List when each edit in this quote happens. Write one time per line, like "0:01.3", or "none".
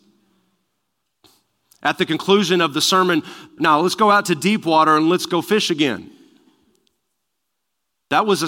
0:03.6